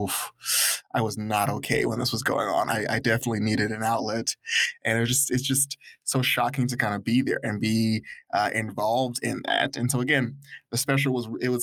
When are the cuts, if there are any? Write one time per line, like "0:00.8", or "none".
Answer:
none

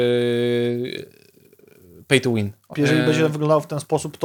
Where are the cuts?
0:02.7

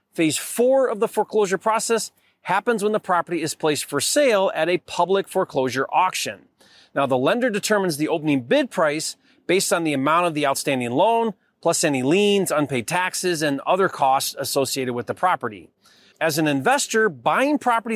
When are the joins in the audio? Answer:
0:16.1

